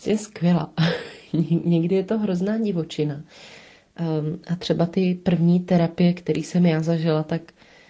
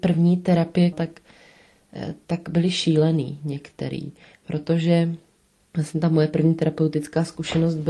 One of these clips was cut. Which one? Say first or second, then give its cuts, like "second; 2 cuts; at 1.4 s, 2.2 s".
second; 1 cut; at 0.9 s